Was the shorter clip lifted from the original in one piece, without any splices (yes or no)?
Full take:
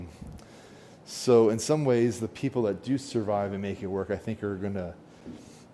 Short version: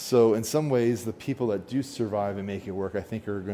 yes